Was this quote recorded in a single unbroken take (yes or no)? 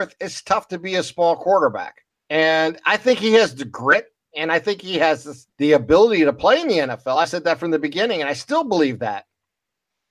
yes